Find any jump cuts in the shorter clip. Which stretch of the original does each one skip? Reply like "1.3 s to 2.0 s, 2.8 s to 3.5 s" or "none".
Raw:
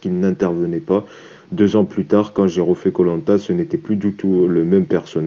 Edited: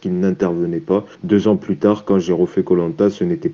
1.1 s to 1.4 s

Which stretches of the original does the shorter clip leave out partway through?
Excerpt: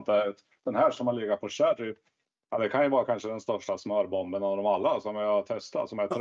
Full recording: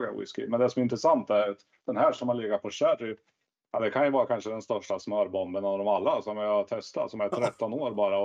none

